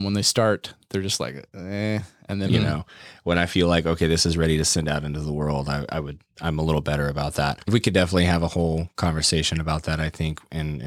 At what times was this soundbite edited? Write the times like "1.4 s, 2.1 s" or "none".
2.5 s